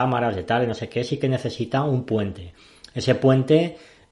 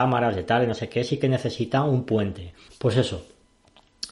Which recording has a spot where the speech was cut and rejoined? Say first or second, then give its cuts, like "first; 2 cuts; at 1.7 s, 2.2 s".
second; 1 cut; at 2.7 s